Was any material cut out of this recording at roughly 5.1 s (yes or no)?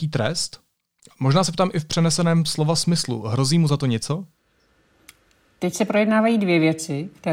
no